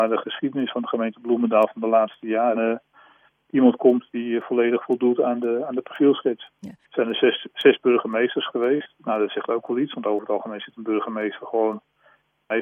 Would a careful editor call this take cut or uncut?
cut